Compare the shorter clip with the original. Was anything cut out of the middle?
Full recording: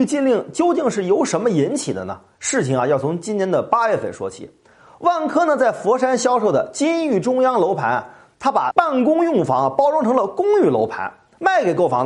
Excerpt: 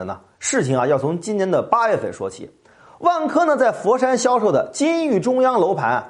no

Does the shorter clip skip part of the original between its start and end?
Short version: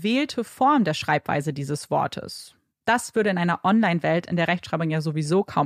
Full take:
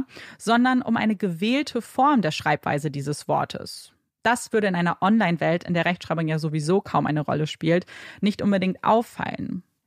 no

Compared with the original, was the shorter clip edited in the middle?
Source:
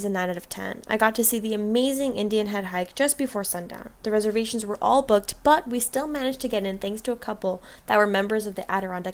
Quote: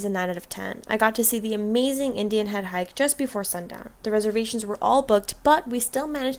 no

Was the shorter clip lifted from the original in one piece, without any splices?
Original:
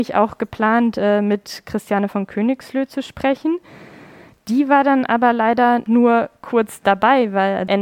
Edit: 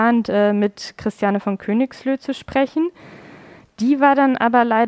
yes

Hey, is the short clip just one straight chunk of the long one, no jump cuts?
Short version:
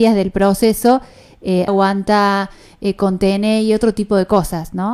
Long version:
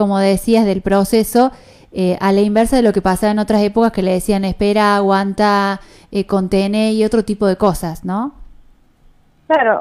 no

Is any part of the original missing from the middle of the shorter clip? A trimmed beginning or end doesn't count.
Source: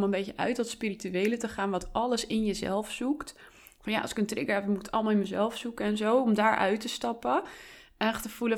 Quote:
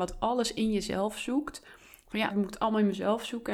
yes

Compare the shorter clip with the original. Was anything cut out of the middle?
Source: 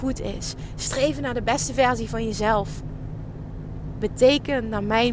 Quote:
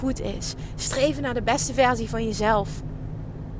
no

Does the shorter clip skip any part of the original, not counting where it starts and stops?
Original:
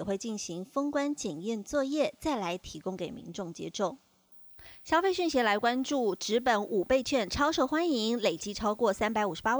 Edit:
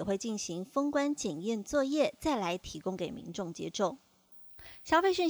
no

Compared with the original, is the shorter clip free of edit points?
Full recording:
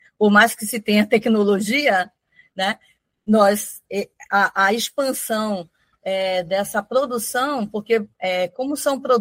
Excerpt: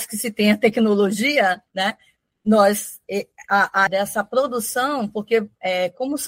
no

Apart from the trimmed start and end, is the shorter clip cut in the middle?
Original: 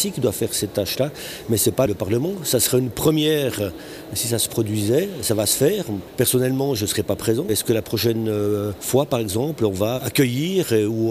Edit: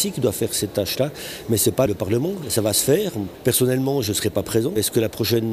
yes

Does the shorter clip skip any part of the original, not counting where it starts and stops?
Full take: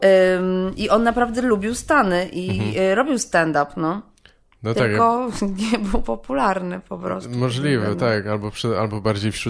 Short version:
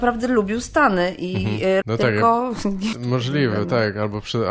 yes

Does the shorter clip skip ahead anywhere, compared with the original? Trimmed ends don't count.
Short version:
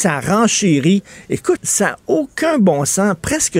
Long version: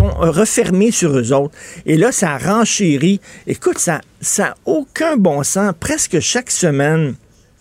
yes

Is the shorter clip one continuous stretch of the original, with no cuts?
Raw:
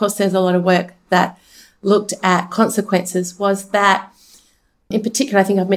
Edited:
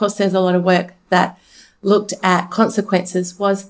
yes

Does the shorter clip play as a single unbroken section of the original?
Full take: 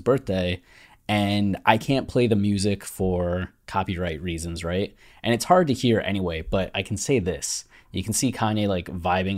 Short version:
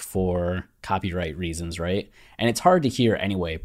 yes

